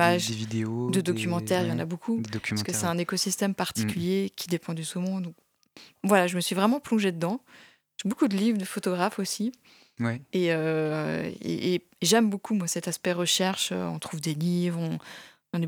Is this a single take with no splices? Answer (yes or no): yes